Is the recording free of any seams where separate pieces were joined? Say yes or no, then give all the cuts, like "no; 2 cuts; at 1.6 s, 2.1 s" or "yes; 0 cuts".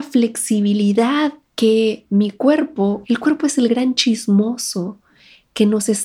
no; 2 cuts; at 1.4 s, 3.0 s